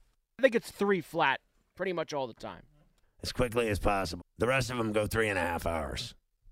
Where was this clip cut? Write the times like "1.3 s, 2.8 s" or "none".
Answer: 3.0 s, 4.2 s